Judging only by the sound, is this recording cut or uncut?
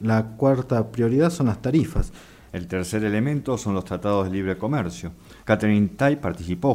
cut